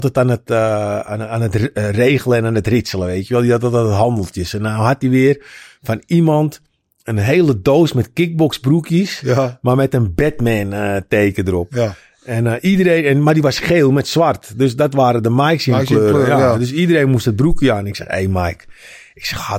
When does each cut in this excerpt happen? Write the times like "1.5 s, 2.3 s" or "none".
none